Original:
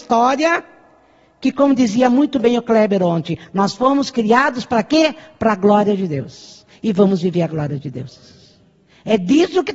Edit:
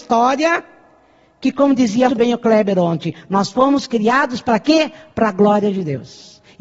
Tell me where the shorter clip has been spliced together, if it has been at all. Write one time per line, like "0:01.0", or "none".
0:02.1